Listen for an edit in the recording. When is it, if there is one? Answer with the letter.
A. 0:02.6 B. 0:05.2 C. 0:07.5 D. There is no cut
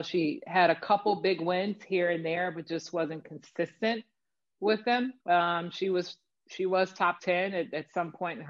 B